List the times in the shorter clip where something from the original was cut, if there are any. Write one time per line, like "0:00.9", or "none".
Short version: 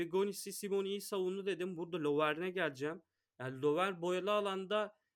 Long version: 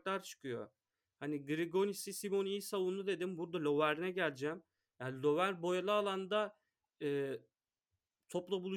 none

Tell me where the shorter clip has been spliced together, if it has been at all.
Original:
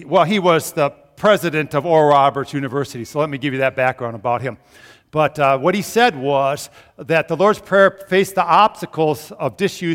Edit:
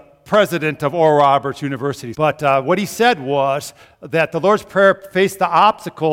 0:02.1

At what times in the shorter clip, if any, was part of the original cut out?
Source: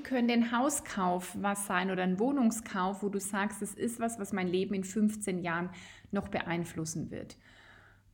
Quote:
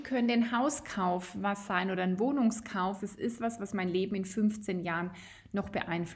0:03.0

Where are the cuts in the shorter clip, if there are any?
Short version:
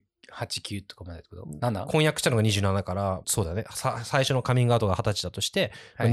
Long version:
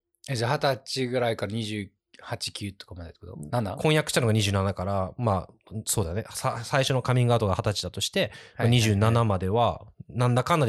0:03.2

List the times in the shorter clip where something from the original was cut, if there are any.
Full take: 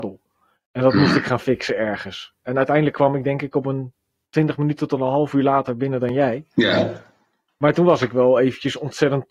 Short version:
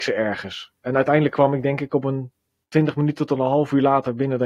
none

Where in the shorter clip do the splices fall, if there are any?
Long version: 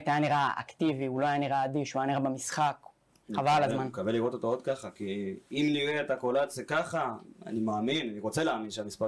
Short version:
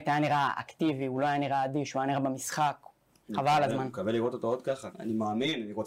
0:04.9

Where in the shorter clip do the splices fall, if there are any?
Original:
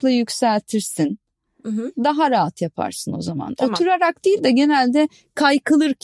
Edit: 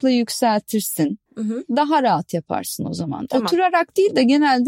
0:01.3

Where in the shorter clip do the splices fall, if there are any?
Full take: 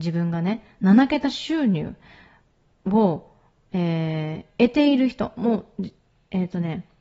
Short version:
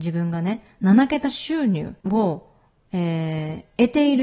0:02.0

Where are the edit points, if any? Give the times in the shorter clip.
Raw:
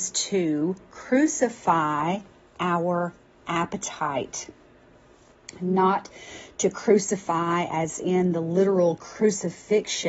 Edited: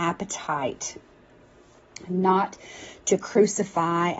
none

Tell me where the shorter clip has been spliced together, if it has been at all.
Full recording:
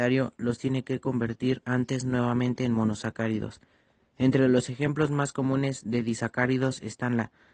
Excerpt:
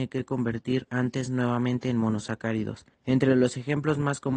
0:02.9

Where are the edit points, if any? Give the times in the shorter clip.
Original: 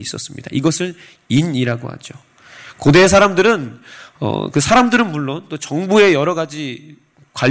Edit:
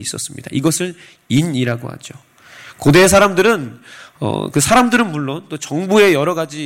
none

